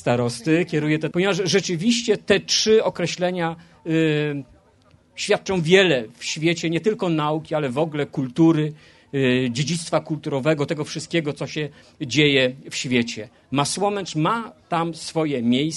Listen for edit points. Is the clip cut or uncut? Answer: cut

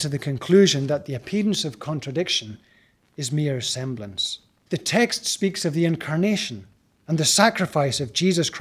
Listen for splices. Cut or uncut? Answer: cut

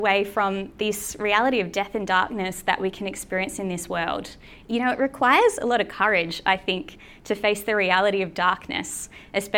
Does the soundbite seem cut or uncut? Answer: cut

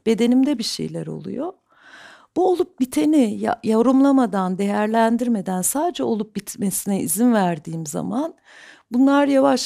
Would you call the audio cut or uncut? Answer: uncut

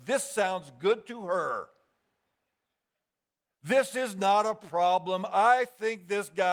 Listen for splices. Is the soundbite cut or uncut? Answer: uncut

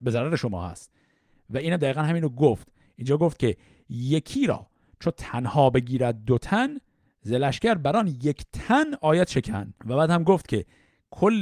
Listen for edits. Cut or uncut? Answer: cut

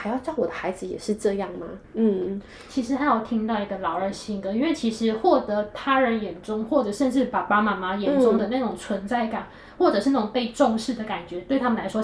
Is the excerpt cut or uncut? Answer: cut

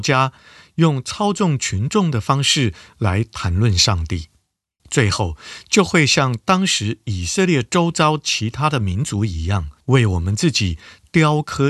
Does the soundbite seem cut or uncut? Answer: cut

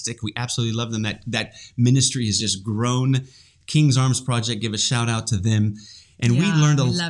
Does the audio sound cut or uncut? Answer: uncut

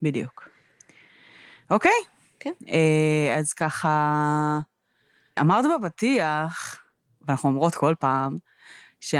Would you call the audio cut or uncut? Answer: cut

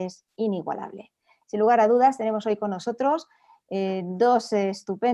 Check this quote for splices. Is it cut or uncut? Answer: cut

